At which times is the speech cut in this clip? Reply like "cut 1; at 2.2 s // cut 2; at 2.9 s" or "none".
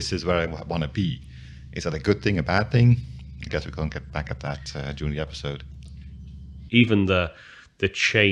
cut 1; at 6.7 s